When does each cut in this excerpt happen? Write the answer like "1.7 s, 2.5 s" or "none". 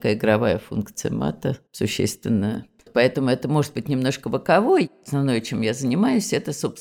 1.7 s